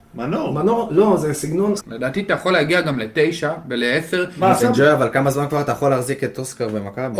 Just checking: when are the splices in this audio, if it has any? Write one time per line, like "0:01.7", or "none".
0:01.8
0:04.6